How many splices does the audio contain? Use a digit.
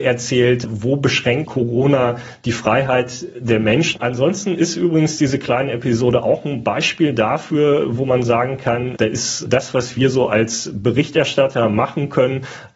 2